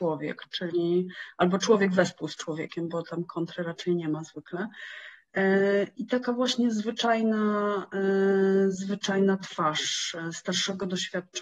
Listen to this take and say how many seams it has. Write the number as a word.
zero